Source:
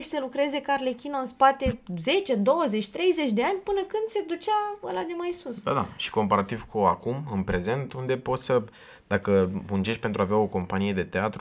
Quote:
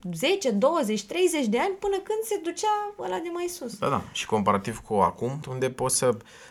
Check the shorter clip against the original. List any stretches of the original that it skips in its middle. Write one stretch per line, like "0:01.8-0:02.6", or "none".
0:07.3-0:07.9